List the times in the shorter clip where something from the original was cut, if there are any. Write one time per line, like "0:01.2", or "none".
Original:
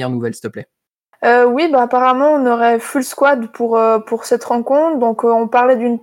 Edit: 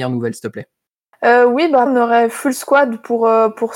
0:01.9